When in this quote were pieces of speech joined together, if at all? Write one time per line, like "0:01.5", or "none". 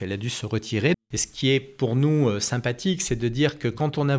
0:00.9